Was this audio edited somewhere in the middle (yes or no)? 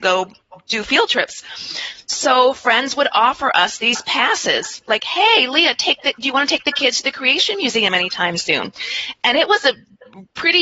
no